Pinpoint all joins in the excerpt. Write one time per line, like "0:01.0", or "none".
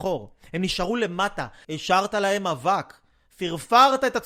0:01.6